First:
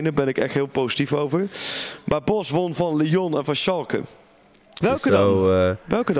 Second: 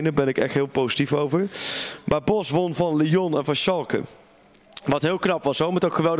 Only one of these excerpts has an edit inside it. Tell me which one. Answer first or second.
first